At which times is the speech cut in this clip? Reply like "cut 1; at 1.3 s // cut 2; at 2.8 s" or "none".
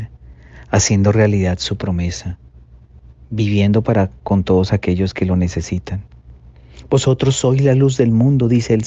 none